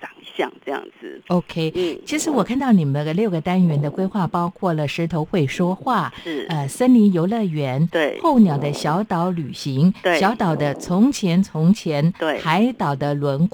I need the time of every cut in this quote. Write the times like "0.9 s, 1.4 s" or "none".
none